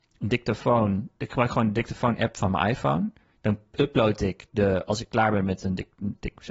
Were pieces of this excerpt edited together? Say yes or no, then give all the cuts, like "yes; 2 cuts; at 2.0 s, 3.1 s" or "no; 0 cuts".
no; 0 cuts